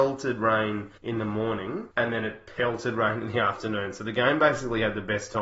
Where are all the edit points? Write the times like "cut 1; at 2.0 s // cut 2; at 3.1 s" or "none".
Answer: none